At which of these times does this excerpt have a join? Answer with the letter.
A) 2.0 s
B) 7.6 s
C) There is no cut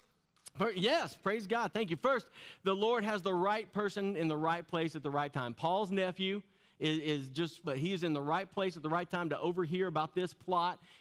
B